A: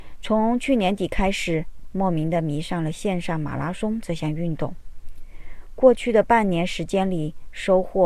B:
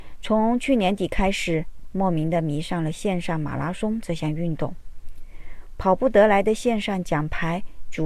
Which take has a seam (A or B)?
B